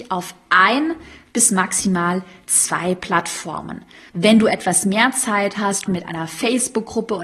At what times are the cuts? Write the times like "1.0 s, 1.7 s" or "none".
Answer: 4.1 s, 5.9 s